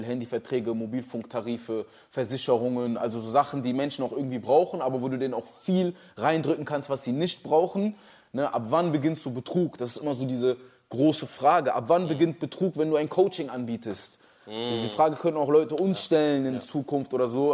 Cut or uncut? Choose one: uncut